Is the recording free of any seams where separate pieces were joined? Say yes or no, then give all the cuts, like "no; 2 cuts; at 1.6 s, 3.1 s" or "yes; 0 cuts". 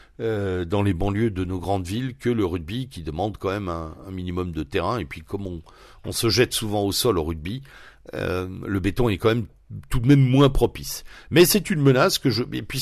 yes; 0 cuts